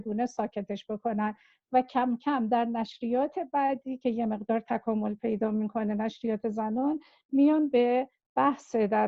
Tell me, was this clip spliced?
no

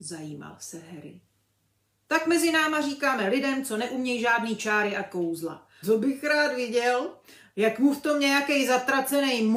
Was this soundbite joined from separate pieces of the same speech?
yes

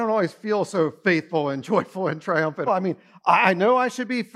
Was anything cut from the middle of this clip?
yes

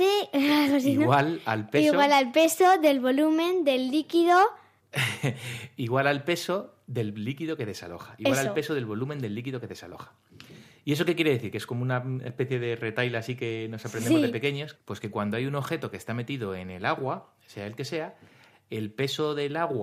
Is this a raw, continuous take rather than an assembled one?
no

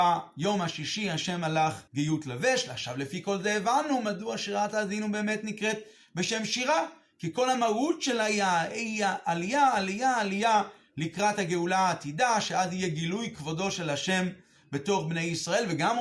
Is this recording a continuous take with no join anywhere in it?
no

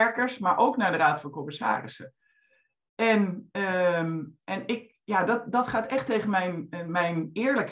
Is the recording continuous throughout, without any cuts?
yes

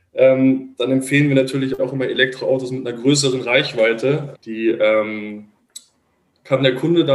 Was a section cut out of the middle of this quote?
yes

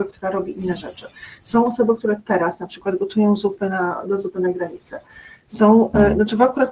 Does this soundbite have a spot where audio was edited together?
no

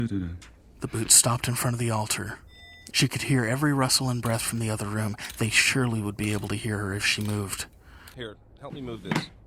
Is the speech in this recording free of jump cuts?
no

